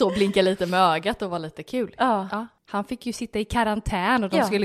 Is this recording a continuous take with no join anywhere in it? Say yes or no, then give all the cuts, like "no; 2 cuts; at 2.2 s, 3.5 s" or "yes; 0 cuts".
yes; 0 cuts